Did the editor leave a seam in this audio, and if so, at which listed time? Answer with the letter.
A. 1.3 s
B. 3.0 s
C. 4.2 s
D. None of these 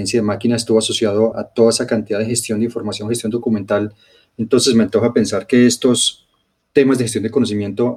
A